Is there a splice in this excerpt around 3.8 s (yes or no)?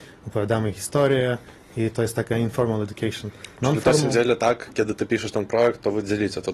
no